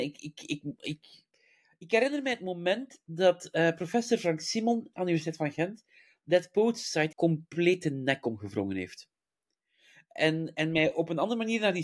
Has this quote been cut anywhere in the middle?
yes; 1 cut; at 7.1 s

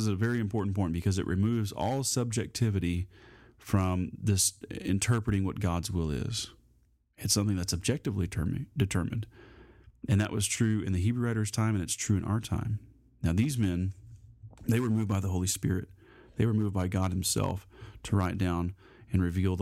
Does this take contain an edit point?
no; 0 cuts

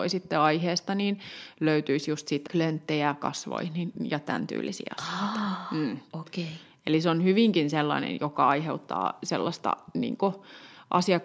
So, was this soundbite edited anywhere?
yes; 1 cut; at 2.5 s

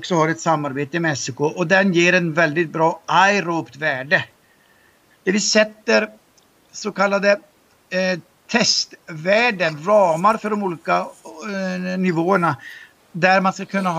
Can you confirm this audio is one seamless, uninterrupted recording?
no; 1 cut; at 5.1 s

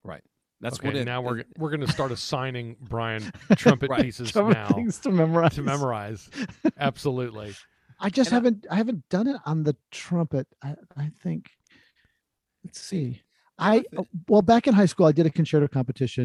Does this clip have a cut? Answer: yes; 1 cut; at 1.5 s

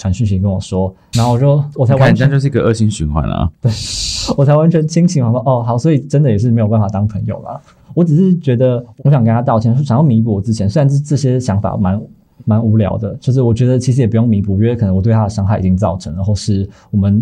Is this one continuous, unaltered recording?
no; 1 cut; at 1.1 s

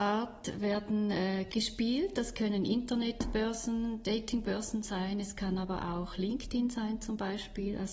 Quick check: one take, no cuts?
no; 1 cut; at 1.5 s

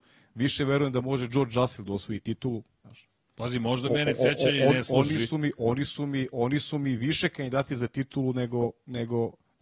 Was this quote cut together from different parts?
no; 0 cuts

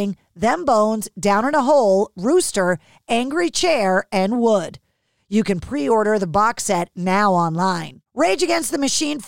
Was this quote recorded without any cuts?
yes; 0 cuts

